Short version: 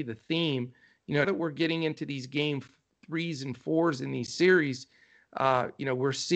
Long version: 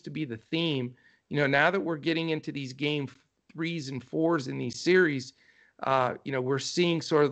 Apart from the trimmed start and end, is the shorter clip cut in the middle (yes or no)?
yes